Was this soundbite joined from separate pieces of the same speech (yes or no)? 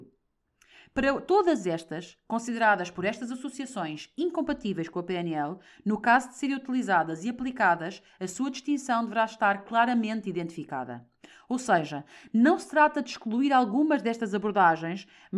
no